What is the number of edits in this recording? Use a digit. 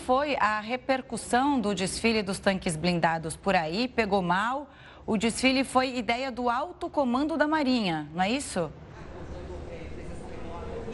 0